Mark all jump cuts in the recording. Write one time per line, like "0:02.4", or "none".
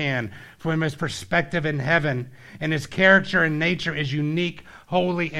none